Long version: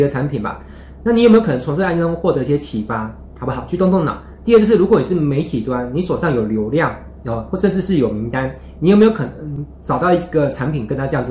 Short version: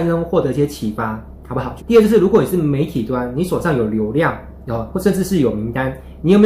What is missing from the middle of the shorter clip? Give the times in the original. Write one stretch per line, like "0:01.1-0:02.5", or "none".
0:03.7-0:04.4